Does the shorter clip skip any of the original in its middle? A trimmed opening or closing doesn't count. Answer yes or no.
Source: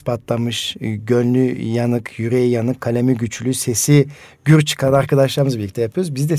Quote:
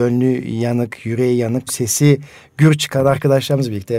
yes